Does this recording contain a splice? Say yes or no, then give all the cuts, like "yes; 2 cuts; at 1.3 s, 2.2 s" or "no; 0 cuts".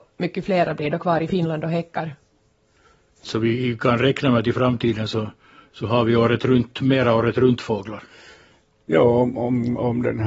yes; 1 cut; at 3.2 s